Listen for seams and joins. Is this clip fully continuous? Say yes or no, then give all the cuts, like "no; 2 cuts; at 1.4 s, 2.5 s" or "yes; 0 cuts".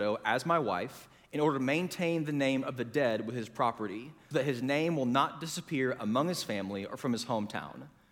no; 1 cut; at 4.3 s